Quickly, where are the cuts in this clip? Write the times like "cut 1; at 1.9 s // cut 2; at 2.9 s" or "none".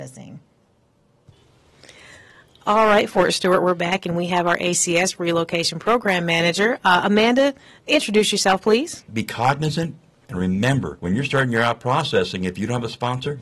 cut 1; at 9.1 s

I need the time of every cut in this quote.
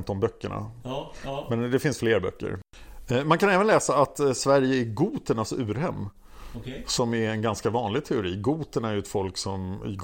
none

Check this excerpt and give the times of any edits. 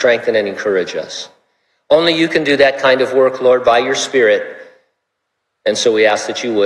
none

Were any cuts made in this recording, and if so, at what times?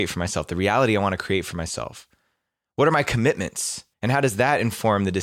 cut 1; at 3.9 s

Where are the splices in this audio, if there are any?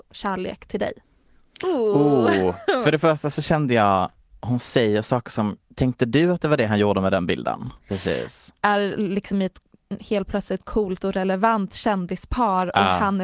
cut 1; at 5.6 s // cut 2; at 7.9 s

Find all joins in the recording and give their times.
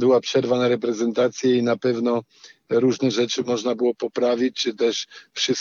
none

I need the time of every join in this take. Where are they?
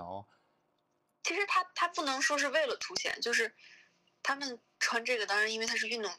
none

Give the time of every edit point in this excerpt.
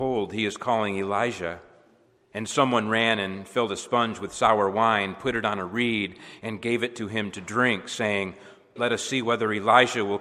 cut 1; at 8.8 s

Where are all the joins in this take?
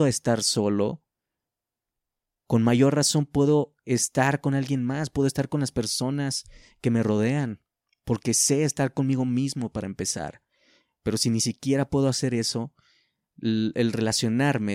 none

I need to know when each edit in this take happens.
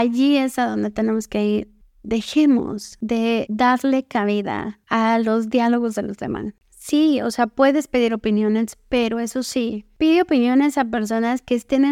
none

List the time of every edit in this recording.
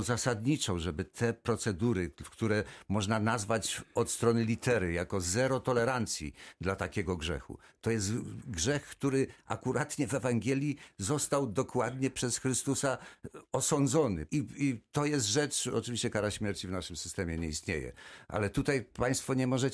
cut 1; at 14.3 s

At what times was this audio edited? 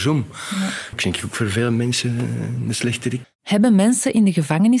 cut 1; at 0.9 s // cut 2; at 3.2 s

